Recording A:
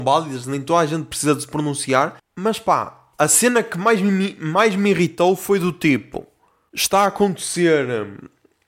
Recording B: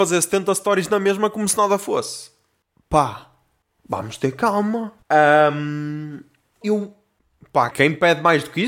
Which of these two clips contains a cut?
B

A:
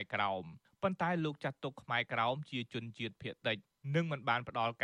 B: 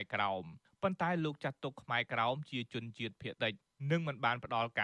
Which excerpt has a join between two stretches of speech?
B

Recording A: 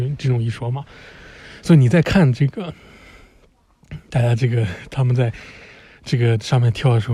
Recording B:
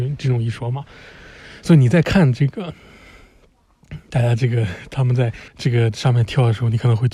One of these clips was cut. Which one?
B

